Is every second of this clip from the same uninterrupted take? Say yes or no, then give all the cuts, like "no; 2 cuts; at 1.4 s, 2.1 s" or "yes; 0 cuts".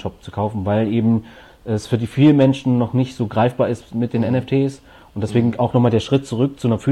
yes; 0 cuts